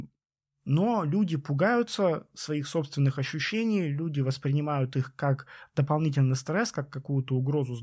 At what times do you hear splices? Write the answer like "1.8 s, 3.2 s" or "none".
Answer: none

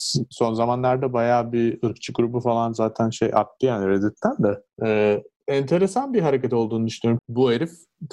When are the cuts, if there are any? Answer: 7.2 s

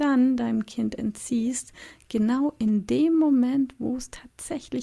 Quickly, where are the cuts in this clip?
none

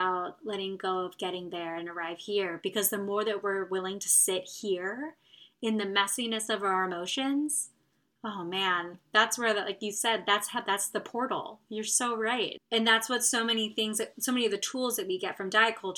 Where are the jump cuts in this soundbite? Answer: 12.6 s

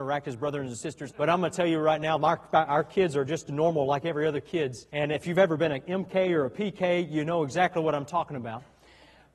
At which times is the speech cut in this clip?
1.1 s, 4.9 s

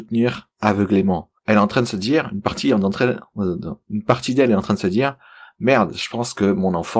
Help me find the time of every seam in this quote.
1.4 s

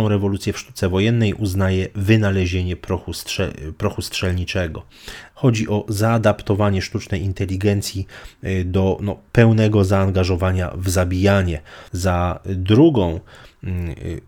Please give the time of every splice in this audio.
5.3 s, 11.9 s

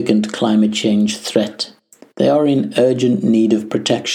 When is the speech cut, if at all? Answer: none

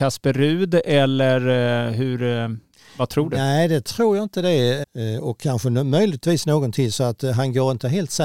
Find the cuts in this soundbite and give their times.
4.8 s

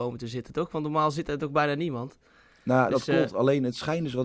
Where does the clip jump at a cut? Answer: none

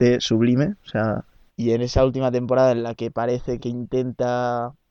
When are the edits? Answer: 1.5 s, 3.6 s

